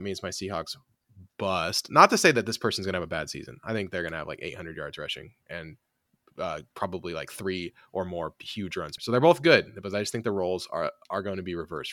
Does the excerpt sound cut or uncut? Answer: cut